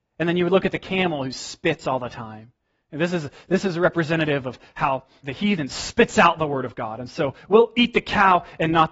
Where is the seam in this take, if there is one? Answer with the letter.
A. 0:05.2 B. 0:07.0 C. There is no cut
A